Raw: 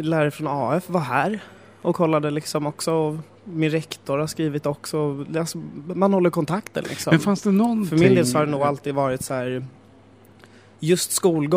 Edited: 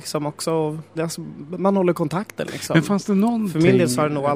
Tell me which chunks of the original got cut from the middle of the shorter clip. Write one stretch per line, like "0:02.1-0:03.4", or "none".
0:03.3-0:05.3